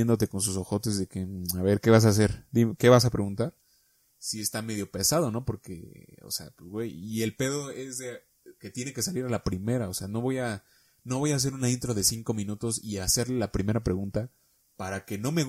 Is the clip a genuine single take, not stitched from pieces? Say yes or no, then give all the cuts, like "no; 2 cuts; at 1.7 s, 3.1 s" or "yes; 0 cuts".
yes; 0 cuts